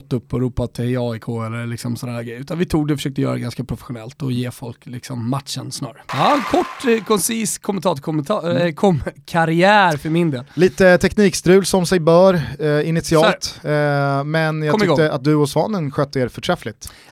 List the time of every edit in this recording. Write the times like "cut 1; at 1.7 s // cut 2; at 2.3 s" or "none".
cut 1; at 6.1 s